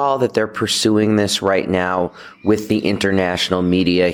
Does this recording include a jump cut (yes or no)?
no